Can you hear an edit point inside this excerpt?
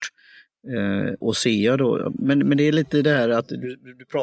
yes; 1 cut; at 1.2 s

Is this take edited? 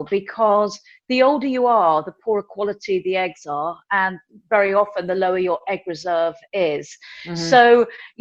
no; 0 cuts

